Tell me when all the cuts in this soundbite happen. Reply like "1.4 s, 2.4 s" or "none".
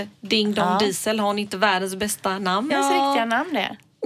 2.7 s